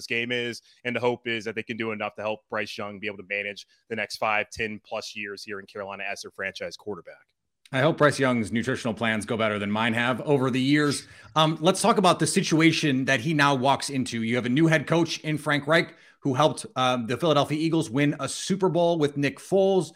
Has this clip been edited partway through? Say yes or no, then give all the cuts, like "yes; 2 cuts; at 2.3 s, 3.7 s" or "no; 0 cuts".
no; 0 cuts